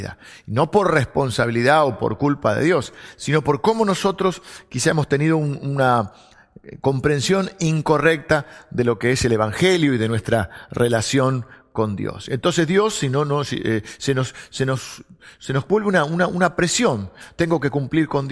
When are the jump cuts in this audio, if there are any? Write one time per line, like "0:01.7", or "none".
none